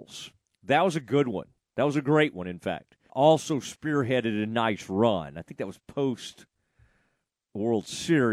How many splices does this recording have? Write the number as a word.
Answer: one